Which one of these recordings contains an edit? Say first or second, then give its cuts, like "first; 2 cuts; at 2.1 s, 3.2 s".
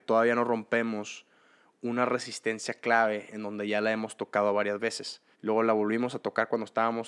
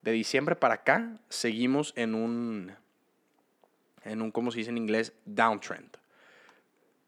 first; 1 cut; at 5.3 s